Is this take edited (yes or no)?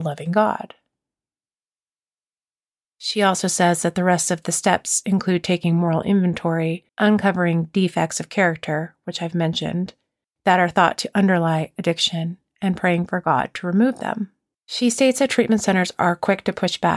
yes